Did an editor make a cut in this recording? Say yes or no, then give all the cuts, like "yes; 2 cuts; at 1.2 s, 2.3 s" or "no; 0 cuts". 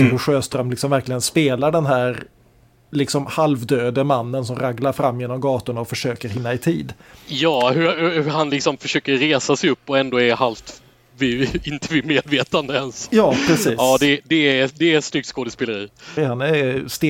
yes; 1 cut; at 16.2 s